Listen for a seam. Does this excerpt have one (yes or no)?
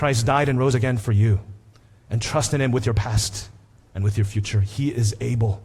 yes